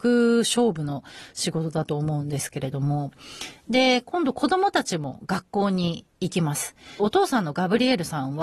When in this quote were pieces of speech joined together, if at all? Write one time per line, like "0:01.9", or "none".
0:07.0